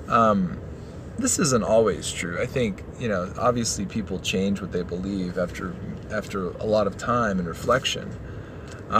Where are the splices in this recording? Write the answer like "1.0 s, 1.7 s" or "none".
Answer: none